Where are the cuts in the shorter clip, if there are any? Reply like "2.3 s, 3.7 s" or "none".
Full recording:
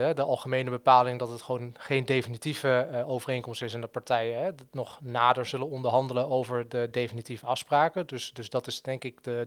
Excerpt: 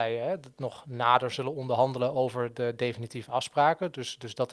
none